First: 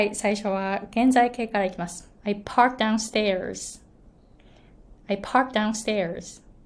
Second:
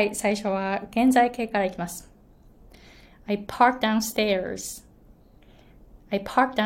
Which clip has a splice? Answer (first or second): first